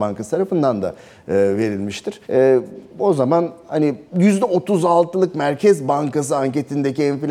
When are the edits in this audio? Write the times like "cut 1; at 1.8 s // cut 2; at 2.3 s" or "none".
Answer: cut 1; at 2.2 s // cut 2; at 4.1 s